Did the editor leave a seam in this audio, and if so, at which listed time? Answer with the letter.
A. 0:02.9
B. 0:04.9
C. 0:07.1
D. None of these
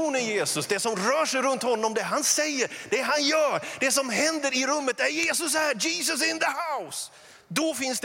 D